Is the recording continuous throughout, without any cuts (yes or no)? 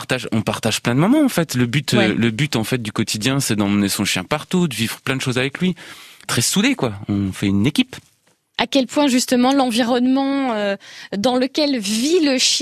no